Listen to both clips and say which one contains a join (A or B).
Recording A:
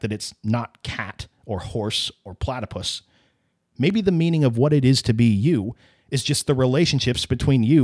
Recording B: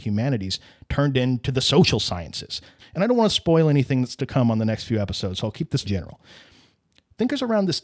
B